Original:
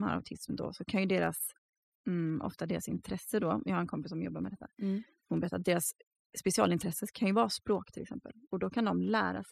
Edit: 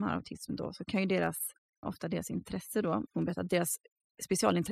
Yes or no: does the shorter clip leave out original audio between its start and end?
yes